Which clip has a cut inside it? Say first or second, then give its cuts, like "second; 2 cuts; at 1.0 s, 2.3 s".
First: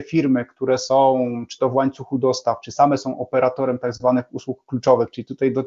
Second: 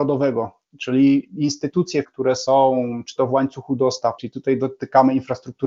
second; 2 cuts; at 2.0 s, 4.2 s